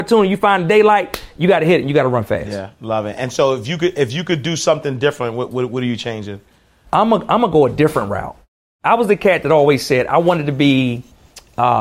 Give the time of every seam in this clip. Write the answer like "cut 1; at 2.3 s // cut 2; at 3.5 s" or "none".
none